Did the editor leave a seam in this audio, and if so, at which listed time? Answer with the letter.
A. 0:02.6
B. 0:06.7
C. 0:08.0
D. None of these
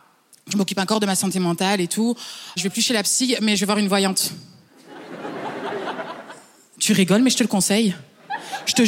A